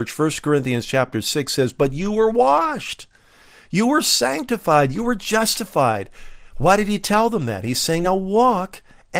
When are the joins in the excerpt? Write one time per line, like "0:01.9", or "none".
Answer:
none